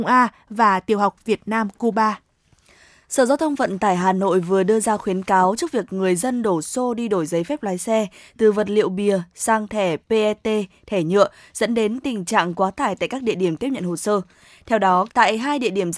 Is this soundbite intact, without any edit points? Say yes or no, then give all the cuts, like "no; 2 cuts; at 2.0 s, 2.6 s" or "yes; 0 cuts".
no; 1 cut; at 15.1 s